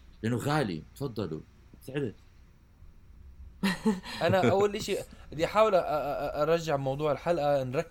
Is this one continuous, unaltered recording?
yes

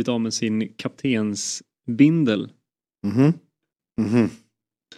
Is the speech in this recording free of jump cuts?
no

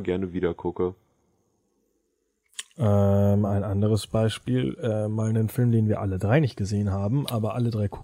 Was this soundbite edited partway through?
no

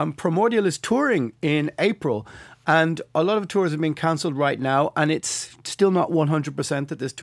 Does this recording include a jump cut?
no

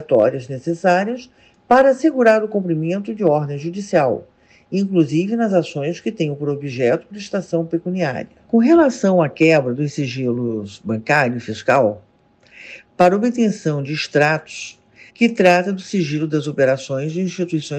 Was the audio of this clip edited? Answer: yes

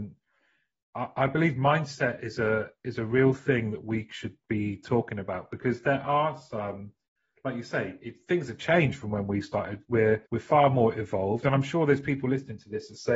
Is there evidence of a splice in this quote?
yes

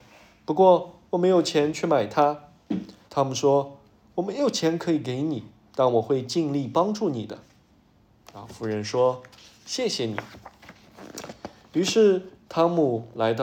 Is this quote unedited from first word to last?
no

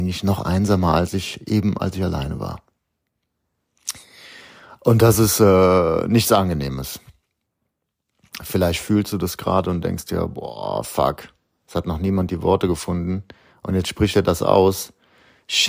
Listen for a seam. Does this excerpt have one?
no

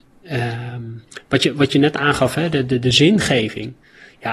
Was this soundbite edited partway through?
no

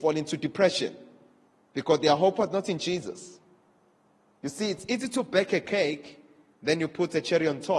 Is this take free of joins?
yes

